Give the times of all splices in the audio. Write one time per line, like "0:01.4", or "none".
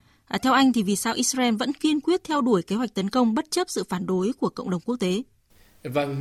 none

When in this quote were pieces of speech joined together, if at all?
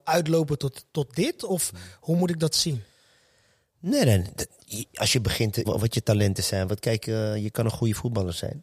0:05.6

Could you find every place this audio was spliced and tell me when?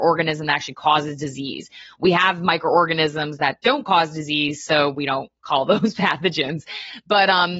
none

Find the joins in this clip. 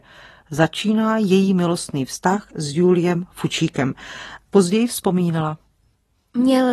none

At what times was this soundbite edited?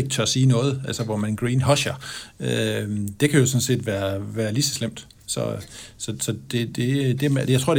none

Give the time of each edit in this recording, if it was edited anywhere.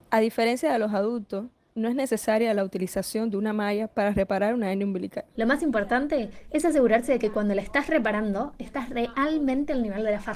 0:05.3

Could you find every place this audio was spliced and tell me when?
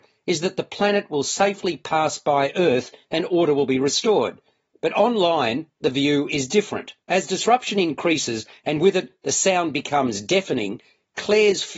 0:07.0

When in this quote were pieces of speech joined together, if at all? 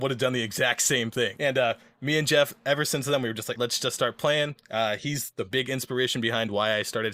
0:01.4
0:03.5

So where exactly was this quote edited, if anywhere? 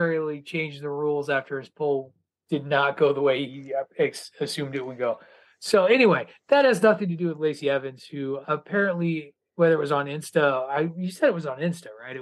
none

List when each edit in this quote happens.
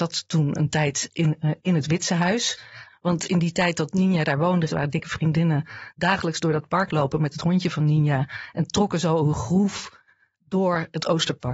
0:01.6
0:02.9
0:04.7

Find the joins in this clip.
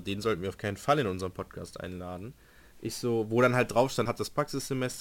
0:02.7
0:04.1

